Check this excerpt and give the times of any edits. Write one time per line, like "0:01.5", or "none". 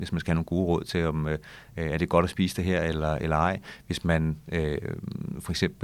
none